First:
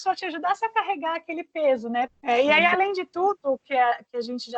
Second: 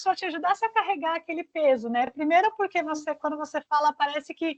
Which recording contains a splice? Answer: first; 1 cut; at 2.1 s

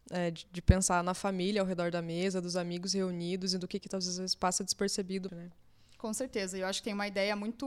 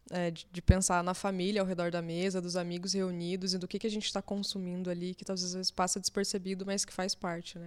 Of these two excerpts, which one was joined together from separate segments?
first; 2 cuts; at 3.8 s, 5.3 s

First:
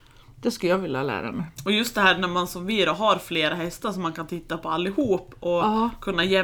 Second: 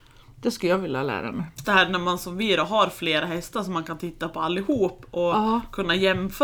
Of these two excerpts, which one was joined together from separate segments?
second; 1 cut; at 1.6 s

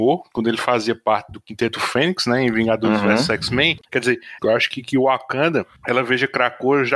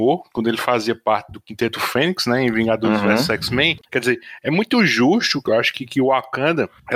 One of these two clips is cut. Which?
first; 1 cut; at 4.4 s

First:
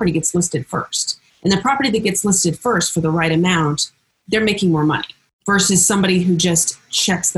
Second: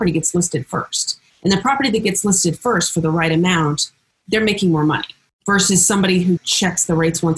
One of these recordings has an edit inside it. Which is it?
second; 1 cut; at 6.4 s

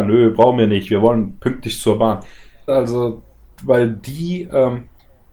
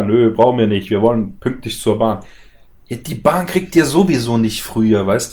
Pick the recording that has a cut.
first; 1 cut; at 2.7 s

